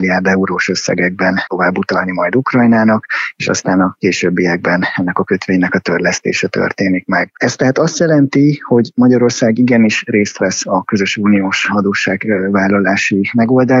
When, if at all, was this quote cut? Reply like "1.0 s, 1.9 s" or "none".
none